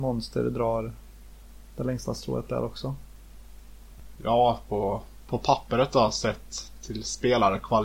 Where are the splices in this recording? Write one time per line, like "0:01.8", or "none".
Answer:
0:04.2